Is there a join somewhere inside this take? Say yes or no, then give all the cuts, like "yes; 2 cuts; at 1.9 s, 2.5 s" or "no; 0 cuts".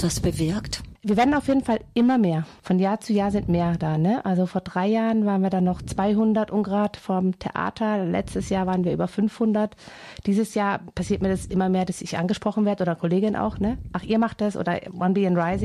no; 0 cuts